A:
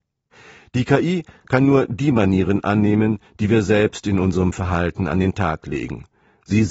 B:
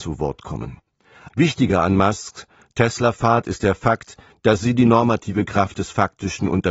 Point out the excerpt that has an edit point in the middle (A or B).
B